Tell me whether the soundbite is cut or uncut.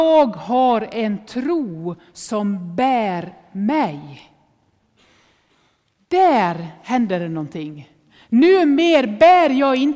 uncut